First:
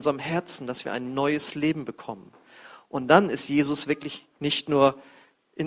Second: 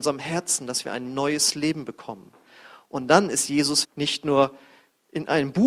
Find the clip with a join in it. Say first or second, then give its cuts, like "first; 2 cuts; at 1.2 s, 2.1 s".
second; 1 cut; at 3.8 s